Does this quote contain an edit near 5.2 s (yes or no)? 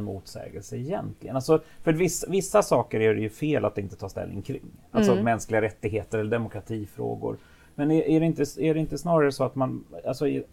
no